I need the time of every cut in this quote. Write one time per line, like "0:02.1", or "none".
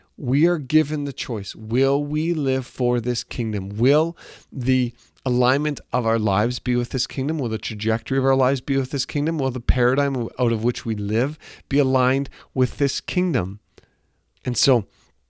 0:14.4